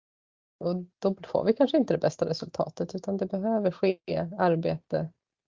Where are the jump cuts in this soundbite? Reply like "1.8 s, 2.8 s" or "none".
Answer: 0.9 s